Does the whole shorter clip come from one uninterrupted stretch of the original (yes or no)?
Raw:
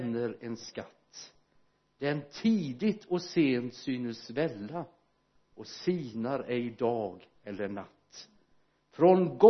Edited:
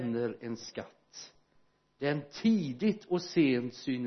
yes